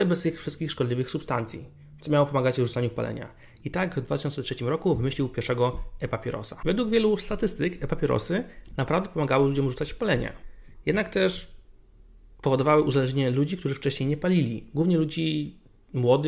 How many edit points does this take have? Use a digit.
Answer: 1